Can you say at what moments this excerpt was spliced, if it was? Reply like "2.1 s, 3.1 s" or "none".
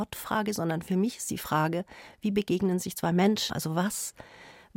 3.5 s